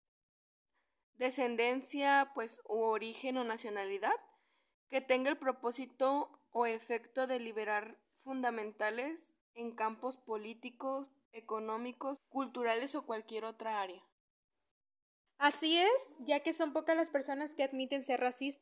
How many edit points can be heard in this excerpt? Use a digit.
2